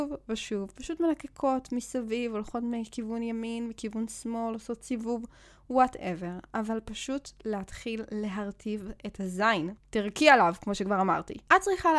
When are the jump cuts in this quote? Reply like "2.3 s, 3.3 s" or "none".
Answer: 9.8 s